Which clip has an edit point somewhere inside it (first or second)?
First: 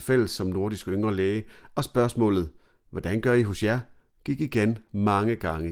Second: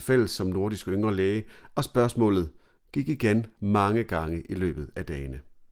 second